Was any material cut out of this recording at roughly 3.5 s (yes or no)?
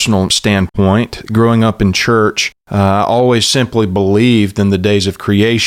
yes